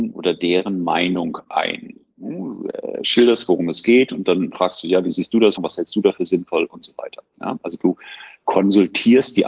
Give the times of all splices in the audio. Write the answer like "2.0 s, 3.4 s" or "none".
5.6 s

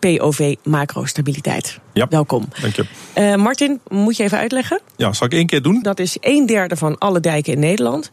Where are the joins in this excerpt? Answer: 3.8 s, 5.8 s

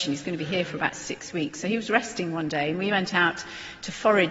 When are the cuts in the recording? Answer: none

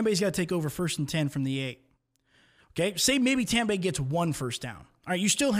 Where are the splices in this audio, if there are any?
none

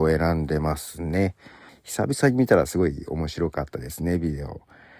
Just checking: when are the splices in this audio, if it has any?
1.7 s

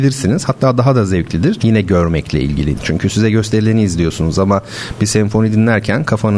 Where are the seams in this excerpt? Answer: 1.6 s, 2.8 s

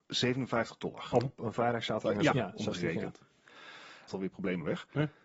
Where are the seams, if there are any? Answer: 1.1 s, 2.3 s, 4.1 s

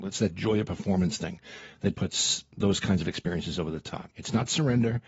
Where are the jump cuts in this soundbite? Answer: 1.9 s, 4.1 s

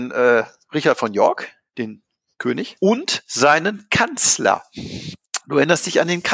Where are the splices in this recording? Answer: none

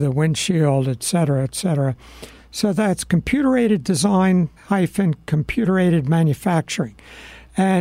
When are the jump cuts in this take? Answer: 2.4 s, 4.6 s

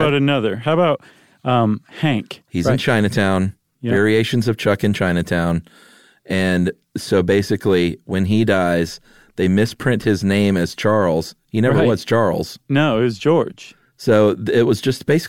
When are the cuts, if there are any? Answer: 2.5 s

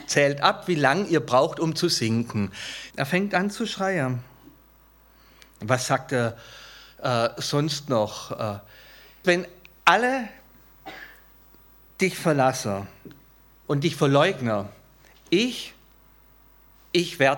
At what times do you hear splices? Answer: 2.9 s, 9.2 s

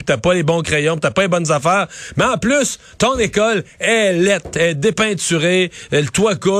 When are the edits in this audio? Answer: none

